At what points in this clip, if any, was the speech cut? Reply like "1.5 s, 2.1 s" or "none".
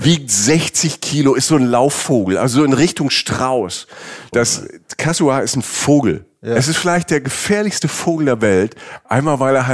4.3 s